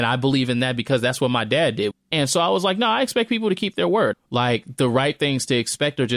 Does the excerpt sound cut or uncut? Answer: cut